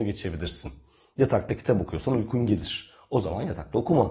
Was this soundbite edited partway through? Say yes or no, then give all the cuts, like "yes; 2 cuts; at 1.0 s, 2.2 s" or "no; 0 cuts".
no; 0 cuts